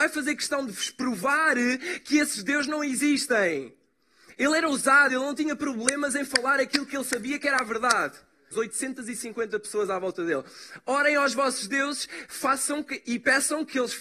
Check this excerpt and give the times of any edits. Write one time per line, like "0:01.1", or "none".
0:05.1
0:08.5